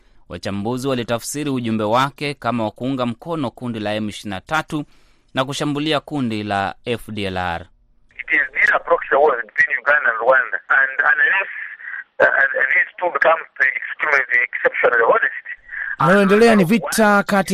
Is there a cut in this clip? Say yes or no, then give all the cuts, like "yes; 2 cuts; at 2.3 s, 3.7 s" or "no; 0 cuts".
yes; 1 cut; at 10.7 s